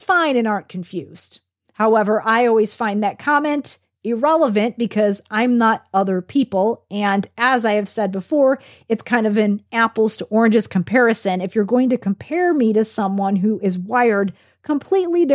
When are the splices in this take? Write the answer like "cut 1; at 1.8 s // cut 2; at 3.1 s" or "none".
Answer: none